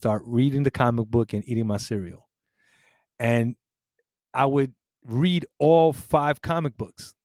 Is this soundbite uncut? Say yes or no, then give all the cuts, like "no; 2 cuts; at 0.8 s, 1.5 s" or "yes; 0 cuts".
yes; 0 cuts